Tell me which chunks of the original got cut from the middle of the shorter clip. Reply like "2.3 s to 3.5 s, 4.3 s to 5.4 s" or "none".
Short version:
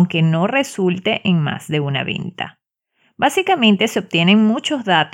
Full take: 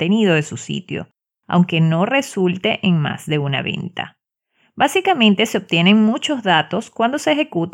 none